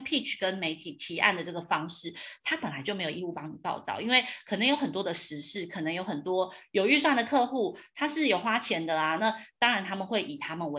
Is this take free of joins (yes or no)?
yes